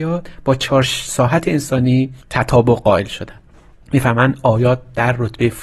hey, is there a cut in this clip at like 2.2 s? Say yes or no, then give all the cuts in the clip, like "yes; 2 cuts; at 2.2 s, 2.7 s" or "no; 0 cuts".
yes; 1 cut; at 2.2 s